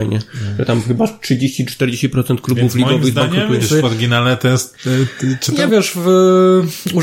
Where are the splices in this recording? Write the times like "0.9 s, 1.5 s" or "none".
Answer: 3.6 s, 5.7 s